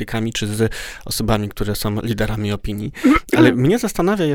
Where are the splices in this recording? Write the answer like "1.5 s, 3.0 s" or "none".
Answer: none